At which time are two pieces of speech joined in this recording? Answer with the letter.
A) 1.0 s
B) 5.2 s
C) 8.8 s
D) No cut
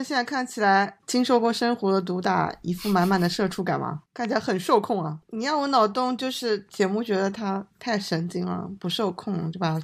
B